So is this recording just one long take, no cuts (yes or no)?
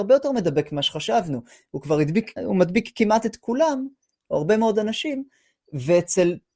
no